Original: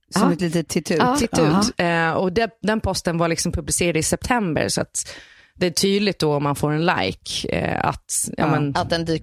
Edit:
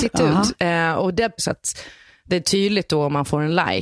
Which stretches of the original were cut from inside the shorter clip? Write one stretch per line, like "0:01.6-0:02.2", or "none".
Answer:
0:02.6-0:04.7